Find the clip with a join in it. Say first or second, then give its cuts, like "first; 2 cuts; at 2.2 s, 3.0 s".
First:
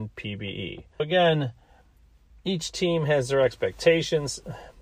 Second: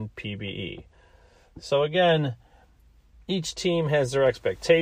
first; 1 cut; at 1.0 s